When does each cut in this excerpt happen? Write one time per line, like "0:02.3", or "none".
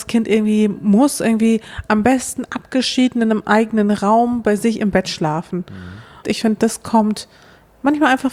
0:06.2